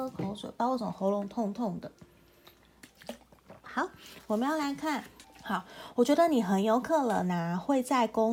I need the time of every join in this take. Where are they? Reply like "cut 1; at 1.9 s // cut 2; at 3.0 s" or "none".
cut 1; at 3.6 s // cut 2; at 5.2 s